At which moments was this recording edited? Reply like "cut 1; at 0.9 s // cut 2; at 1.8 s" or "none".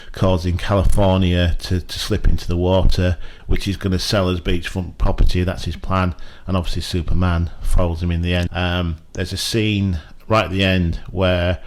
cut 1; at 3.4 s // cut 2; at 8.5 s